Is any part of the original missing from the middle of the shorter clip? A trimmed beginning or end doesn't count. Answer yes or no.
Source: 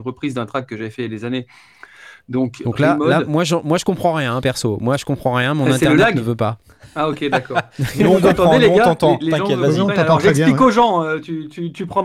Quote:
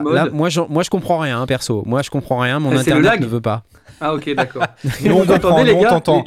no